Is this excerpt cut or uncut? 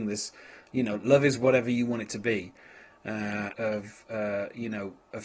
cut